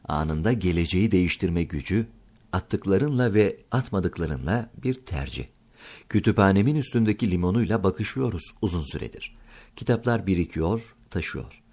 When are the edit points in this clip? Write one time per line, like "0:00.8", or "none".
none